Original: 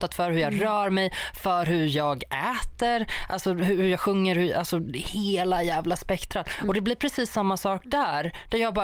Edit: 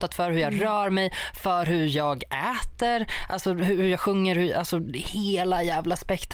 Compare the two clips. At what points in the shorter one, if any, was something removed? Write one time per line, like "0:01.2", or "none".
none